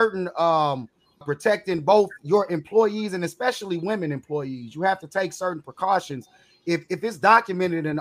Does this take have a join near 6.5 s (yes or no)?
no